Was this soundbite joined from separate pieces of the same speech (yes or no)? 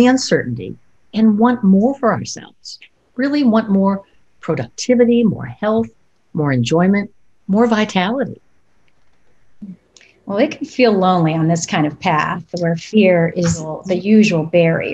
no